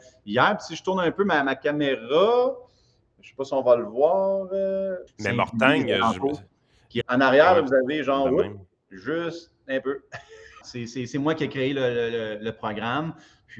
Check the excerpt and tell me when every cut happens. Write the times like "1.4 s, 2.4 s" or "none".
5.1 s, 7.0 s, 10.6 s